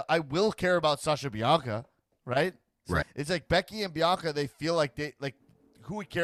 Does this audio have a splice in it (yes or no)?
yes